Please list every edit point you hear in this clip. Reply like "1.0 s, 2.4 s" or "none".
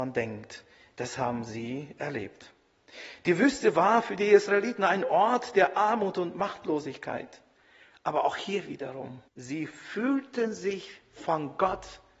9.3 s